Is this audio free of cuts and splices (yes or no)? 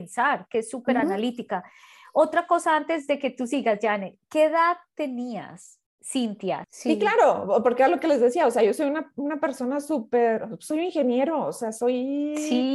no